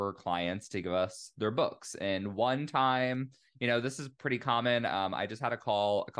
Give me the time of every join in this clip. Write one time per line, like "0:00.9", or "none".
none